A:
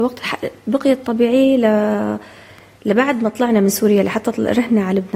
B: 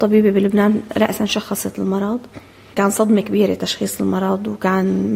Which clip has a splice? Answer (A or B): B